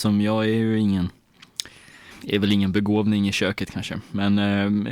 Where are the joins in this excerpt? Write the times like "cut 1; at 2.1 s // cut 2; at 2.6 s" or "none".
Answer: cut 1; at 2.1 s

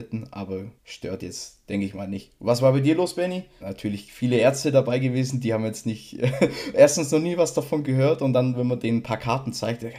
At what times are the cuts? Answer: cut 1; at 3.6 s

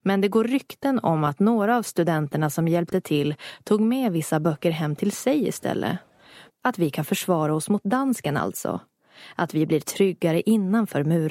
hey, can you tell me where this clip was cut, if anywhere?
cut 1; at 6.5 s

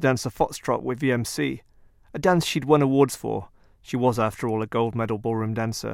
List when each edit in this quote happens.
none

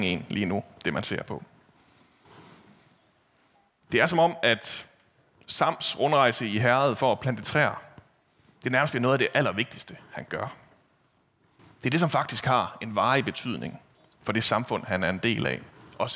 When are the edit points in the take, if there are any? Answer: none

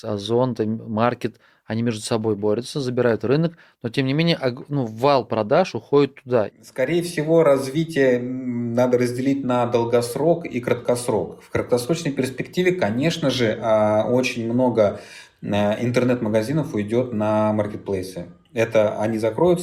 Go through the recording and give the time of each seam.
cut 1; at 6.5 s

